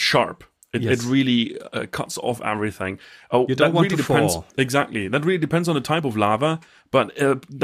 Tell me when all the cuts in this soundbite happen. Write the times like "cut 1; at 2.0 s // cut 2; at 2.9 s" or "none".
cut 1; at 4.5 s